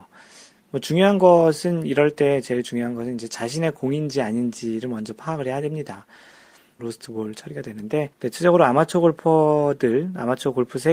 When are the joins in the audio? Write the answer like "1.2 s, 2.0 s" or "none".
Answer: 6.8 s, 8.1 s